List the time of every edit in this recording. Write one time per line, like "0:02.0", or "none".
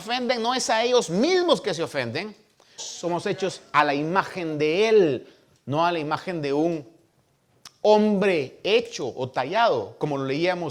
0:02.8

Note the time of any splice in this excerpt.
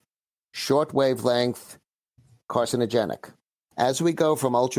0:03.7

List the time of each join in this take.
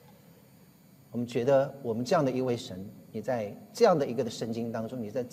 0:01.0

